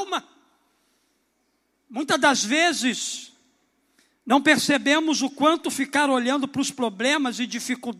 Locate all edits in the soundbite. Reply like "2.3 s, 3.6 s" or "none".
none